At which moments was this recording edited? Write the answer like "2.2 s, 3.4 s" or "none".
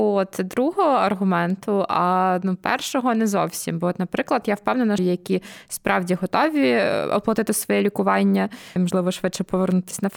5.0 s, 8.8 s